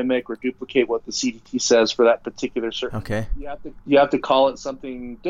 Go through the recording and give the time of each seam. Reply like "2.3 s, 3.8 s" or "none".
2.9 s